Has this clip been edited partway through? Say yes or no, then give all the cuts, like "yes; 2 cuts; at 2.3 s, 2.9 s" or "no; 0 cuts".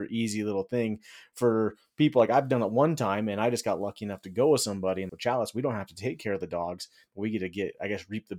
yes; 1 cut; at 5.1 s